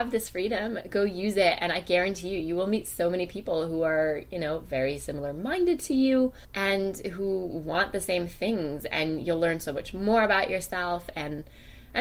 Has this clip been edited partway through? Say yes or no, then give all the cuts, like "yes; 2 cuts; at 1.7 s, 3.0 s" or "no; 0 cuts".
no; 0 cuts